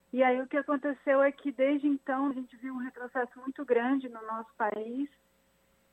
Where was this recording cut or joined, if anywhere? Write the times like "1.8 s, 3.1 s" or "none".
2.3 s

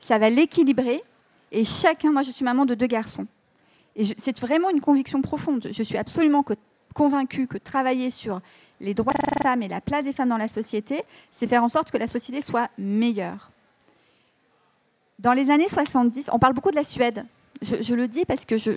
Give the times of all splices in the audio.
none

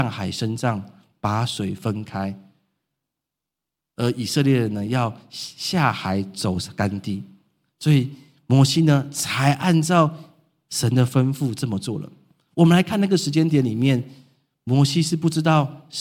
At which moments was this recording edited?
none

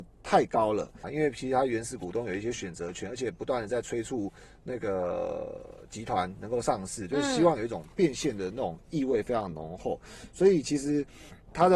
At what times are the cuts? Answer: 1.0 s

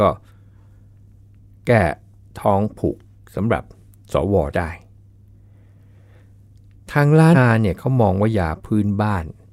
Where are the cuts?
7.3 s

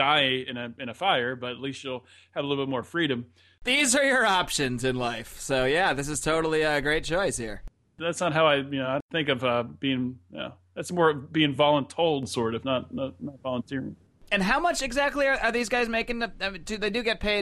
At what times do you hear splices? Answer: none

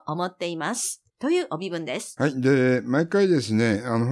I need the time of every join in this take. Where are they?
1.1 s

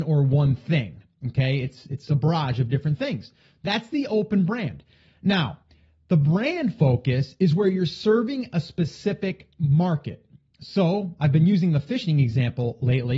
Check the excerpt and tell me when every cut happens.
none

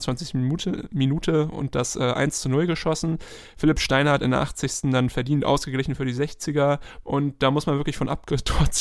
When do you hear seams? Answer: 7.0 s

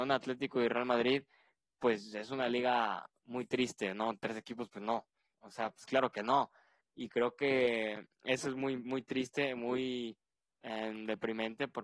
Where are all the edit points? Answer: 5.3 s, 10.5 s

